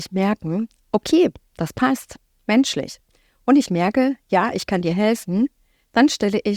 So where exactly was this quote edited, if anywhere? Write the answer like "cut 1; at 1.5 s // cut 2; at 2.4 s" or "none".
none

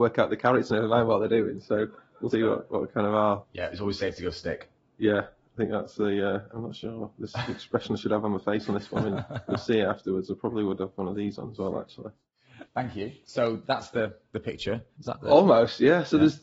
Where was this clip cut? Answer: cut 1; at 2.3 s // cut 2; at 12.6 s // cut 3; at 14.9 s

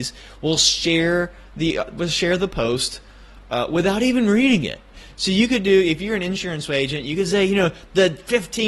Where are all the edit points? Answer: none

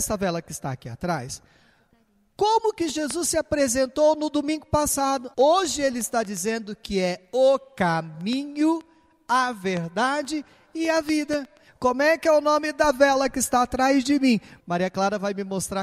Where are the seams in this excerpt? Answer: cut 1; at 5.3 s // cut 2; at 11.7 s // cut 3; at 14.6 s

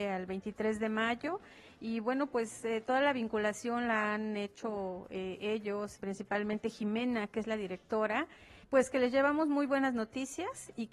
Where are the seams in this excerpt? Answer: cut 1; at 6.0 s // cut 2; at 8.6 s

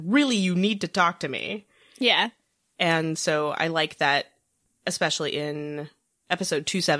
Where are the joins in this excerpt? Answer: none

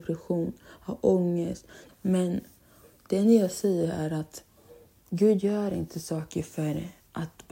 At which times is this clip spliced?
cut 1; at 1.9 s

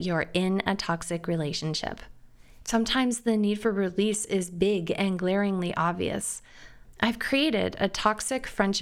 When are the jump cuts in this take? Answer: cut 1; at 2.6 s // cut 2; at 6.9 s

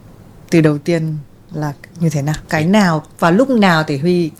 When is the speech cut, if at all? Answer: cut 1; at 2.5 s

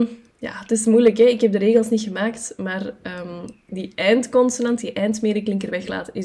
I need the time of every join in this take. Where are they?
none

